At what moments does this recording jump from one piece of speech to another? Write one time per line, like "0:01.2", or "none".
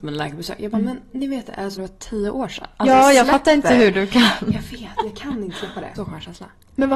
0:01.8
0:06.0